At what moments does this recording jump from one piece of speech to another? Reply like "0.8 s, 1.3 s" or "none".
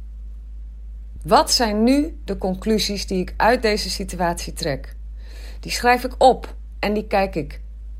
1.2 s